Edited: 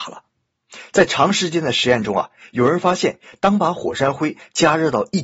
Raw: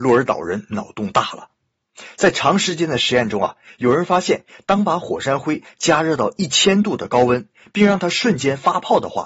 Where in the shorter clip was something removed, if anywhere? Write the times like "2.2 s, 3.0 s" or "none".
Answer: none